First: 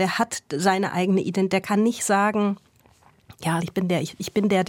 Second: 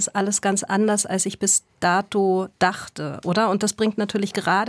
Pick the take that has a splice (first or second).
first